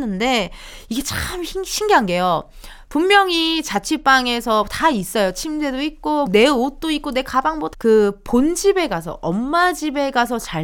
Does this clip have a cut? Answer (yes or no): yes